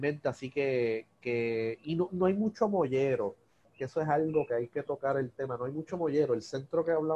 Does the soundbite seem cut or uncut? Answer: uncut